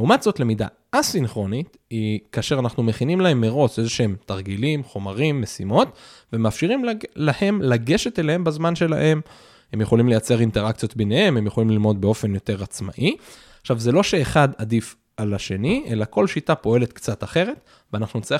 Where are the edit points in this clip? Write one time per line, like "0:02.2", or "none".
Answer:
none